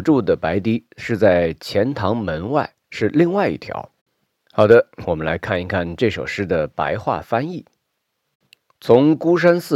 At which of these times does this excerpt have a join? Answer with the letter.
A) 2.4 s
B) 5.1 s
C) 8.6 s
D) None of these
B